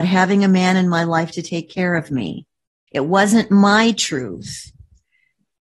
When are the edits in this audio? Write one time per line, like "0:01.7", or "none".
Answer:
0:02.9